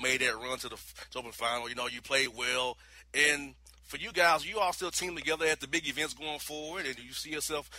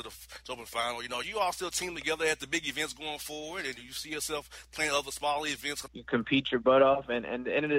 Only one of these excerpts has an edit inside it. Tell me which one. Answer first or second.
second